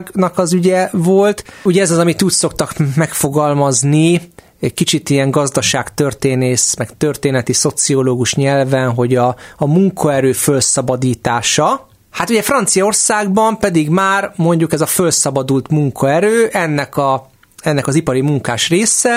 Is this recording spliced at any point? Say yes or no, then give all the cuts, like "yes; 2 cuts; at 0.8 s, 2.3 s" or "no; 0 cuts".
no; 0 cuts